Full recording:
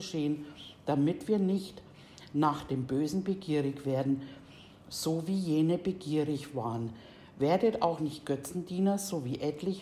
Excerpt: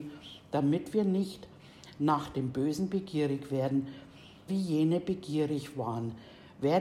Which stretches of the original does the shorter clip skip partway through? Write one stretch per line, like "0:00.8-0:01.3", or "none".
0:04.8-0:05.3